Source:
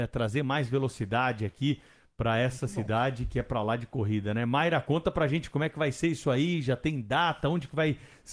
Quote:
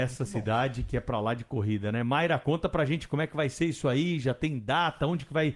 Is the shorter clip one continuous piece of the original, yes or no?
yes